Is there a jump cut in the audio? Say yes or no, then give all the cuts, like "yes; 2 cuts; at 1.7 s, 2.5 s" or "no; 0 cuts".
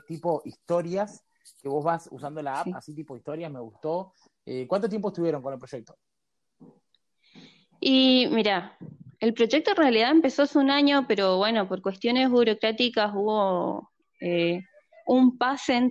no; 0 cuts